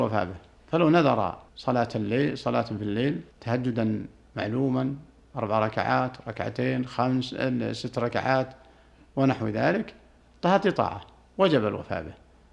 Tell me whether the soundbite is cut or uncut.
cut